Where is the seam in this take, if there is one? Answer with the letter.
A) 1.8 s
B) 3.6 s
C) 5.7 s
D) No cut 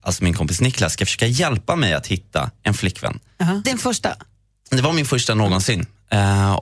B